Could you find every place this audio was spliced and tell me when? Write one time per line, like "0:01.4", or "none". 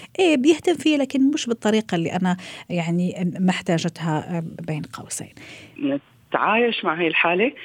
0:05.7